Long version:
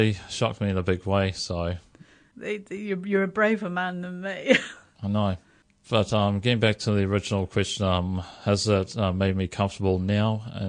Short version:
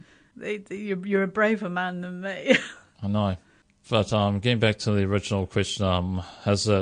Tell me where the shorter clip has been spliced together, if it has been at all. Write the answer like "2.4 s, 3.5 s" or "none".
none